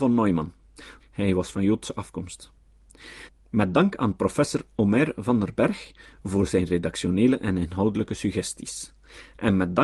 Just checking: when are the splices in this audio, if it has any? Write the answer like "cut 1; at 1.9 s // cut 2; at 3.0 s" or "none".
cut 1; at 1.0 s // cut 2; at 3.3 s